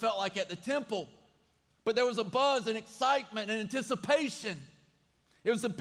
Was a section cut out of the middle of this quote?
no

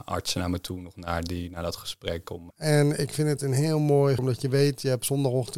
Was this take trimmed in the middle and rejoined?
yes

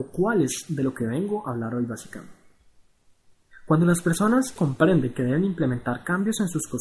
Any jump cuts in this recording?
yes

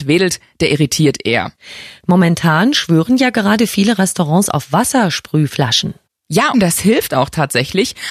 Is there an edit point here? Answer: yes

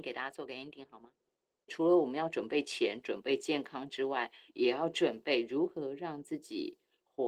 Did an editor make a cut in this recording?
yes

